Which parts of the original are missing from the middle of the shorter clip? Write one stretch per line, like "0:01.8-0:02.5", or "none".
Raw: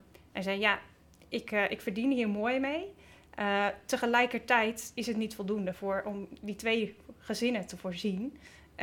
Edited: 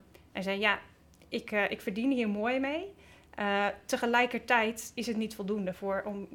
none